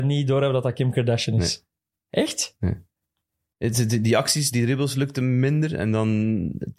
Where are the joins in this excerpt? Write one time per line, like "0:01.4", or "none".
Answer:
0:03.5